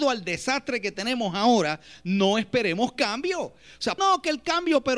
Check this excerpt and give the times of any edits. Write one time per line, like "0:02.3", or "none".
0:04.0